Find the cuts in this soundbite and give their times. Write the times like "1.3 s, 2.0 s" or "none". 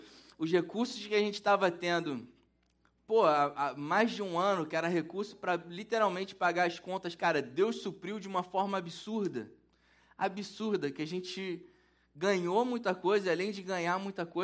none